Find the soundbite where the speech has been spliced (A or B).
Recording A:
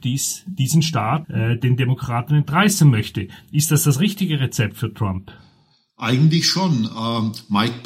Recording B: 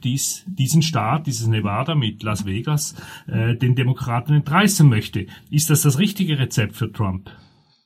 A